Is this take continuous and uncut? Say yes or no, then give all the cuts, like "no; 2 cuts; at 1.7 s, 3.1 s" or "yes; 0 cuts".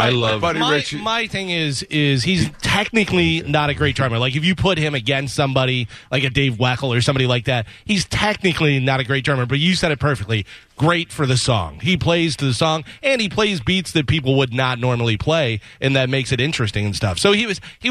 yes; 0 cuts